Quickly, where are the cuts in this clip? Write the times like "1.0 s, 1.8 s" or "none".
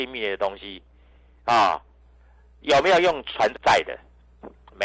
3.5 s

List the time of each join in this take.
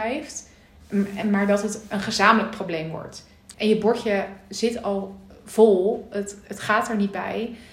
3.5 s

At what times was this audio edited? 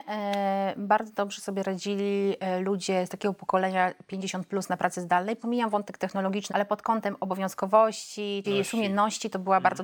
6.5 s, 8.4 s

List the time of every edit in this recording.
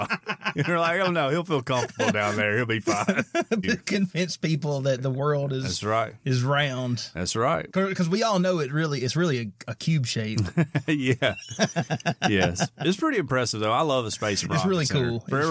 3.6 s

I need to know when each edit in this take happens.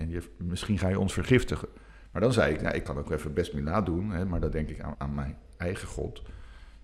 4.9 s

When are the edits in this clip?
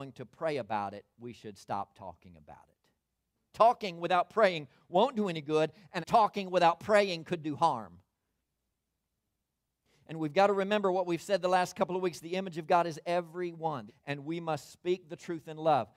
3.5 s, 6.0 s, 13.9 s

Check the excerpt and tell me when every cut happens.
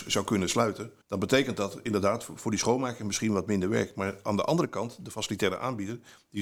1.0 s

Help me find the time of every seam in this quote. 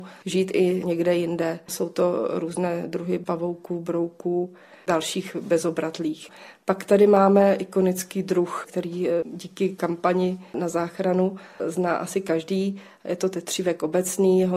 none

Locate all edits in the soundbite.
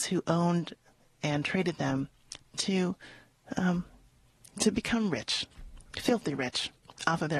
none

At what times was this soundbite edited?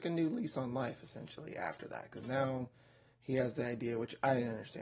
none

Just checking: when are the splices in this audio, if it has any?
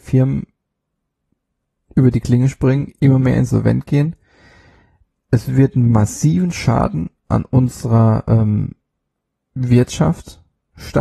none

